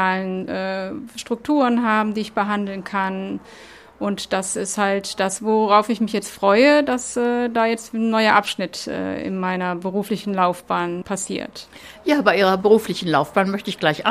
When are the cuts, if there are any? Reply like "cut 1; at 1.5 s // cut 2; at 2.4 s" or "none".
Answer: cut 1; at 5.4 s